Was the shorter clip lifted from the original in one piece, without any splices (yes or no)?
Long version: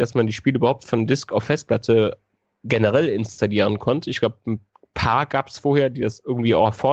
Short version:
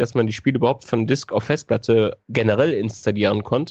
no